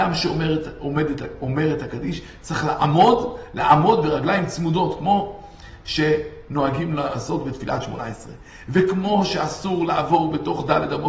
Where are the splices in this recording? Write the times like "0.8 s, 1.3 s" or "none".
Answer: none